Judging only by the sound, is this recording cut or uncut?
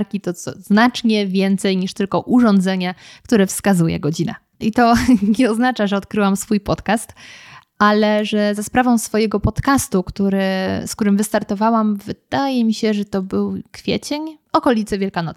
cut